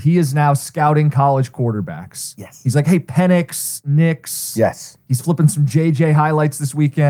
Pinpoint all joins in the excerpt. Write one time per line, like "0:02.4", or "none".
none

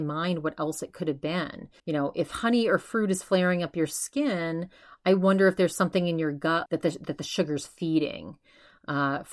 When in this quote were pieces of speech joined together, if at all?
0:01.8
0:06.7

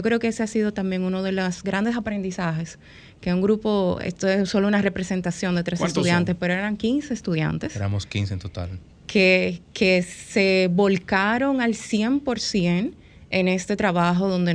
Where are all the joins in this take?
none

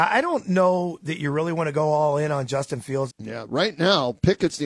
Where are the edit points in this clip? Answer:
0:03.1

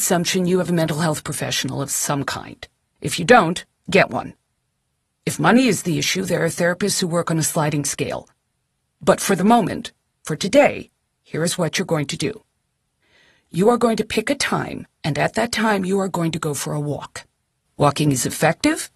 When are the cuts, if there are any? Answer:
0:17.7

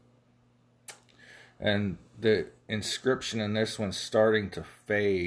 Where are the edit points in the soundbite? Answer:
none

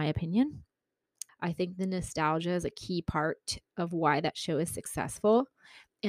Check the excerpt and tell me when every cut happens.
0:01.3

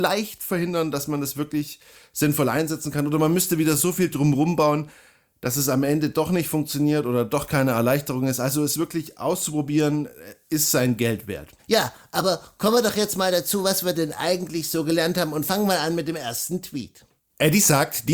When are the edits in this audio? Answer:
0:11.6

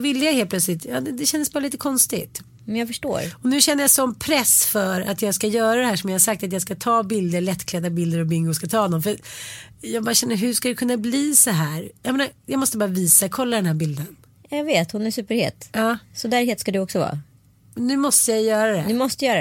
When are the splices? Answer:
none

